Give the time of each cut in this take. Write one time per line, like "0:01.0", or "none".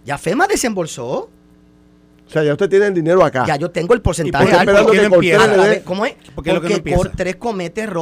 none